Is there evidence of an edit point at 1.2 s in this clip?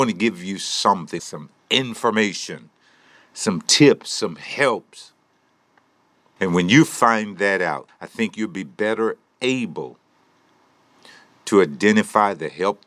yes; 3 cuts; at 1.2 s, 6.4 s, 7.9 s

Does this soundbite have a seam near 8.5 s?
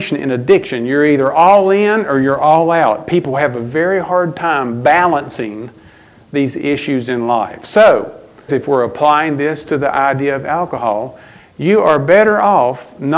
yes; 1 cut; at 8.5 s

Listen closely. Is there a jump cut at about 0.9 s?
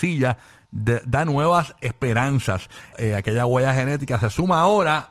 no; 1 cut; at 2.9 s

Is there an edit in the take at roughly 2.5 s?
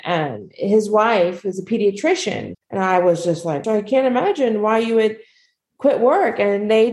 yes; 2 cuts; at 2.5 s, 3.6 s

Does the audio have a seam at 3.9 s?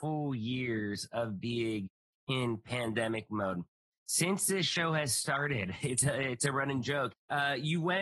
no; 1 cut; at 7.1 s

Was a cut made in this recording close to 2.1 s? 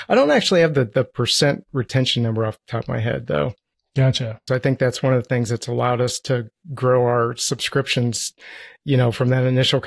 no; 1 cut; at 4.5 s

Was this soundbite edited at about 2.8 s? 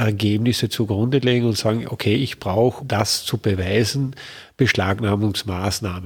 yes; 1 cut; at 2.8 s

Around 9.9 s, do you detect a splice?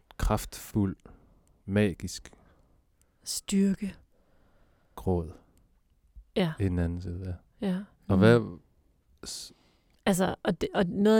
yes; 2 cuts; at 7.9 s, 9.9 s

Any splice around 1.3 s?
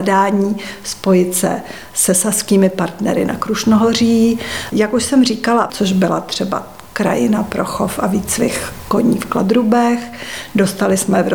no; 2 cuts; at 4.7 s, 5.7 s

